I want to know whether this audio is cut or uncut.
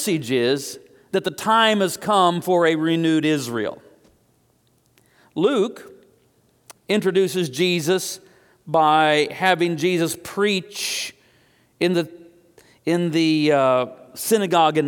uncut